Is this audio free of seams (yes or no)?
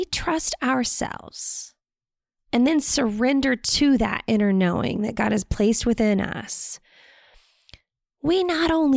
yes